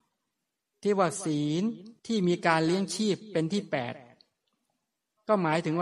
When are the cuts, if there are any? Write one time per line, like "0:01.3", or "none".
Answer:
0:02.0